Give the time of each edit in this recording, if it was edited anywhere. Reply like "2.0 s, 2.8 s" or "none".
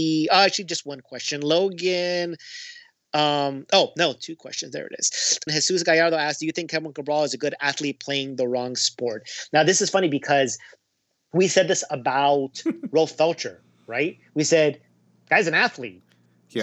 5.5 s